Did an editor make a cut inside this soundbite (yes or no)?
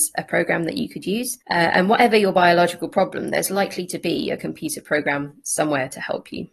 yes